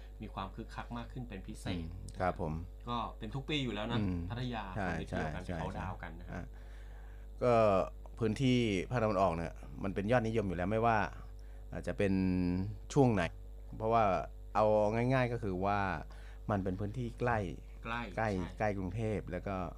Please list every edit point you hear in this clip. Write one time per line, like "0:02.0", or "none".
0:13.2